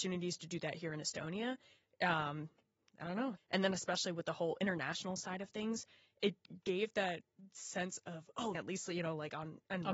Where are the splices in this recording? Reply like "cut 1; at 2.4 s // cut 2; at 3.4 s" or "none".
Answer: cut 1; at 3.4 s // cut 2; at 8.5 s